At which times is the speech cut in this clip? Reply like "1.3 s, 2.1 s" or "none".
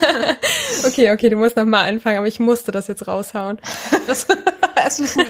4.1 s

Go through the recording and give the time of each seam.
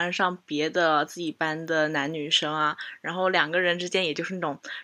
none

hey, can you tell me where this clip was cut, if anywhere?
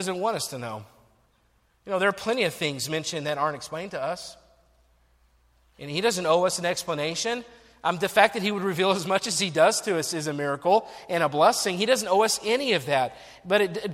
none

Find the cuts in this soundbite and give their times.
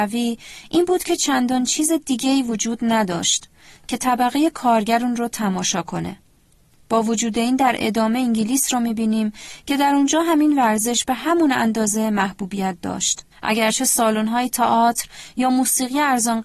13.3 s

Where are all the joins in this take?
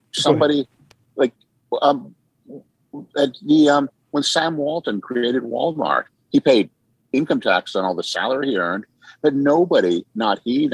none

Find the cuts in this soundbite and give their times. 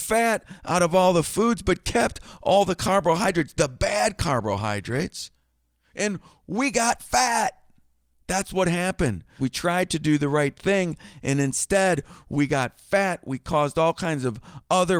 9.4 s

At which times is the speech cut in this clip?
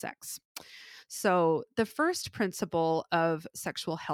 none

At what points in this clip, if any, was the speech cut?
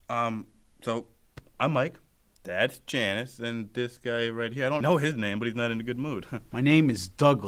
4.8 s

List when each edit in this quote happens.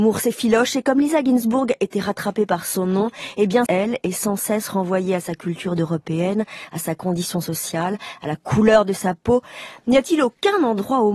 3.7 s

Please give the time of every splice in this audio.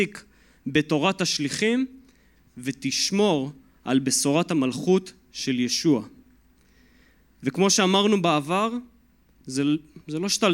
none

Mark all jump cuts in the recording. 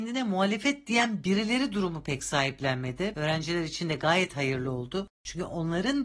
3.1 s

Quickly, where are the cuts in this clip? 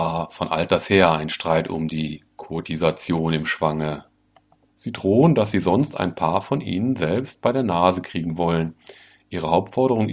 4.7 s

